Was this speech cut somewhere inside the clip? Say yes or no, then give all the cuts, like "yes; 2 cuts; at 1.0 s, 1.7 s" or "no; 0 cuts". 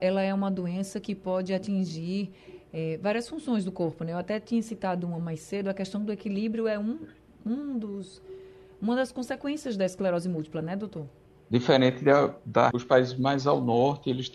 yes; 2 cuts; at 11.4 s, 12.7 s